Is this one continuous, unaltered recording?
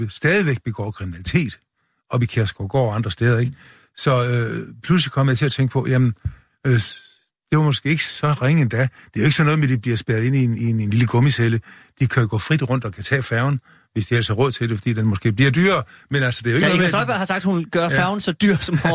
yes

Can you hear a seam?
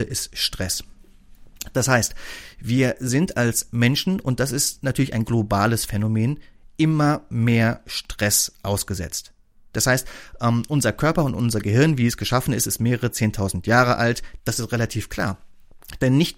yes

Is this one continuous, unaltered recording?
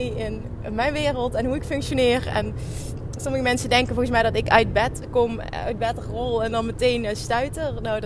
yes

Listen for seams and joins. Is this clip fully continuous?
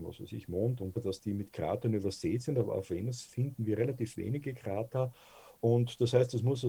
no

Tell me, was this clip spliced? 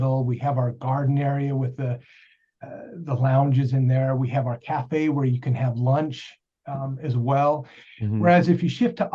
yes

